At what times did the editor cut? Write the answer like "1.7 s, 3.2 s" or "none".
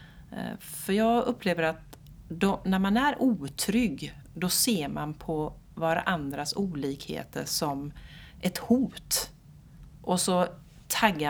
9.9 s